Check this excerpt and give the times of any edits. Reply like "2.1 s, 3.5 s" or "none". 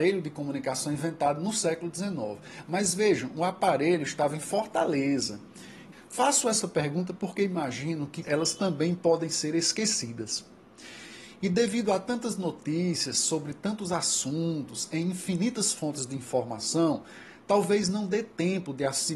5.9 s, 8.2 s